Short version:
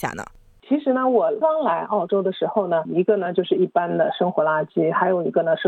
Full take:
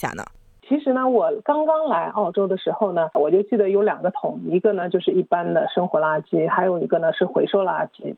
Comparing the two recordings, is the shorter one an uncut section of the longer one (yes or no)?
no